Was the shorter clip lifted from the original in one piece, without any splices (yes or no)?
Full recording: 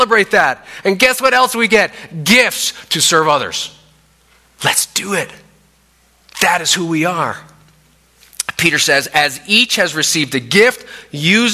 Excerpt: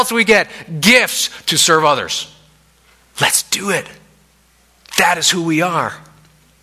yes